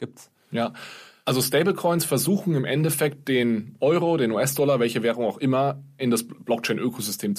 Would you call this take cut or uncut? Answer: cut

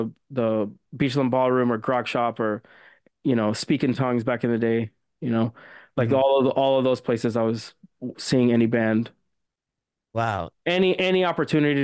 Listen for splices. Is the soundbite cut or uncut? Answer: cut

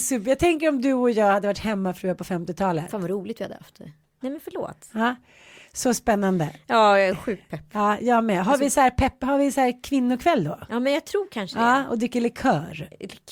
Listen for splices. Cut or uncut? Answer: cut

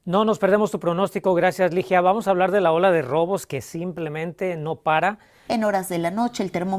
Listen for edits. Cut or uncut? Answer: cut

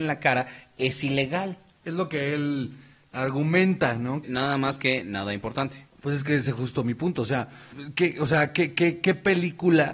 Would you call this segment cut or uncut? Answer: cut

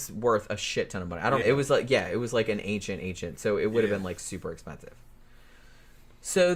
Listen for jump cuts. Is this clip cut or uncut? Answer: cut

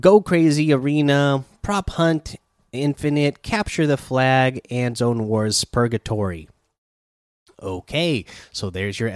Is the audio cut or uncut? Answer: uncut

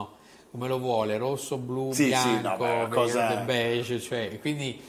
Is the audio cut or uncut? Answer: uncut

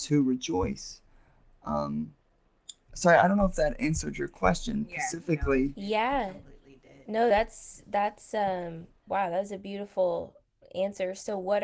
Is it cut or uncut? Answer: uncut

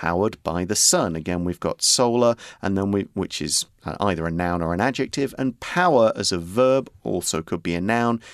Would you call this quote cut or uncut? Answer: uncut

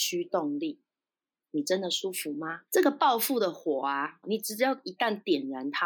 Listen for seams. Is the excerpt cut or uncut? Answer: cut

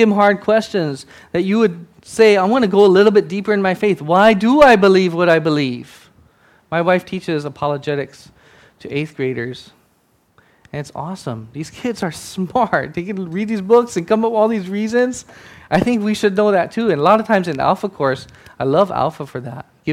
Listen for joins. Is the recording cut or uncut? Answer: uncut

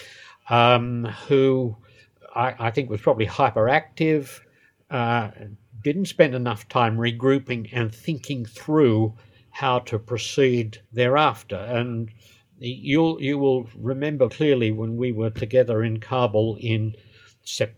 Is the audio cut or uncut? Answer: cut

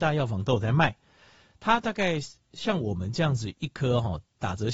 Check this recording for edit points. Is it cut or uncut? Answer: uncut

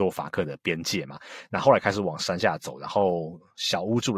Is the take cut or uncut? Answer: uncut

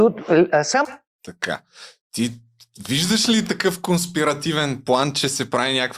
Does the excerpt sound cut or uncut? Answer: uncut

